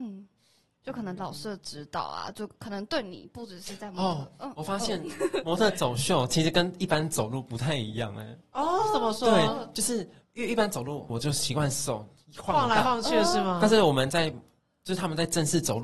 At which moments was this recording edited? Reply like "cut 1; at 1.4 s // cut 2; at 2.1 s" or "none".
cut 1; at 11.1 s

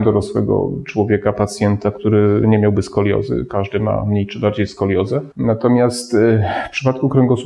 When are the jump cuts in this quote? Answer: cut 1; at 5.3 s

